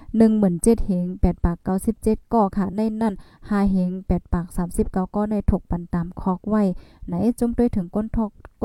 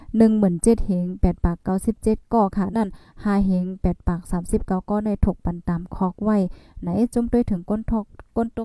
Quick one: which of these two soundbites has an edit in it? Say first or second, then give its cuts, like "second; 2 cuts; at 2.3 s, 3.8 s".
second; 1 cut; at 2.7 s